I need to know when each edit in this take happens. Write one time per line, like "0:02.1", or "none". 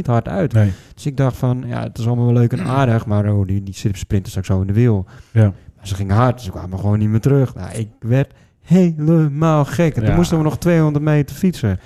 none